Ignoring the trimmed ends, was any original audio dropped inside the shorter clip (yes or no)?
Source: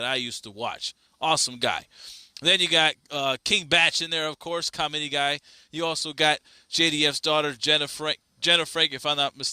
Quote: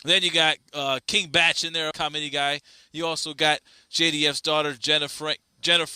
yes